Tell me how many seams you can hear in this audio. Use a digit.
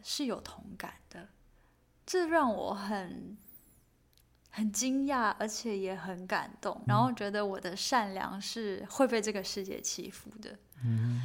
1